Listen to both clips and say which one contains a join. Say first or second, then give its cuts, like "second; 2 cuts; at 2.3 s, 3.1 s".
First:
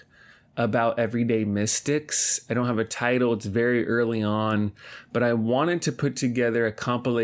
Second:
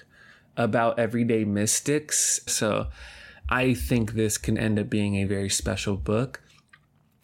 second; 2 cuts; at 2.5 s, 5.3 s